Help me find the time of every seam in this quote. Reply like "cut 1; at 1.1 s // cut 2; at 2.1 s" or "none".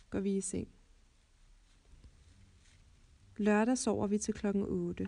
none

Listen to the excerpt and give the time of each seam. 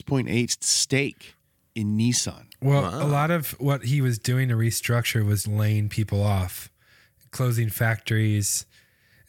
cut 1; at 5.4 s

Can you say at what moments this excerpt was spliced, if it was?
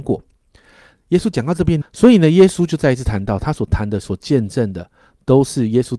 cut 1; at 1.8 s

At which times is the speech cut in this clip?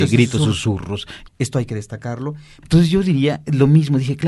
cut 1; at 1.3 s // cut 2; at 2.6 s

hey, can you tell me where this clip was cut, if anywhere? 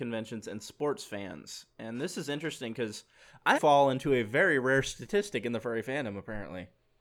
cut 1; at 3.5 s

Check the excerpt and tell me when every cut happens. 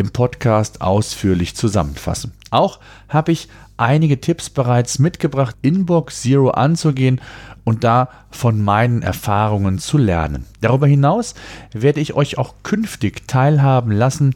cut 1; at 5.5 s // cut 2; at 10.5 s

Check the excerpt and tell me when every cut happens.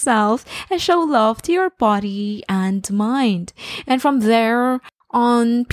cut 1; at 3.8 s

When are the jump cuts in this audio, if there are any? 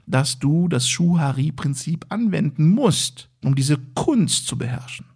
cut 1; at 3.4 s

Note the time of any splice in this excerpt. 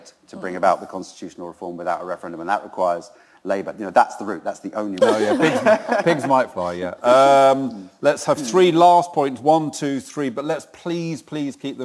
cut 1; at 5.0 s

